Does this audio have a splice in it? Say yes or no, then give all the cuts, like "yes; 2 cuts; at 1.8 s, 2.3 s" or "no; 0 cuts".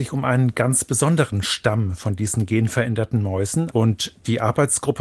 yes; 1 cut; at 3.7 s